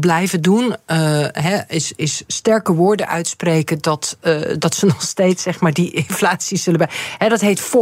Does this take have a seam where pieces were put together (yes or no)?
no